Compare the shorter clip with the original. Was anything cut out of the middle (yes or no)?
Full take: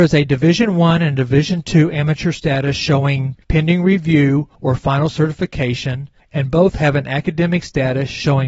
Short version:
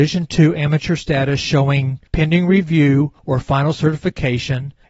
no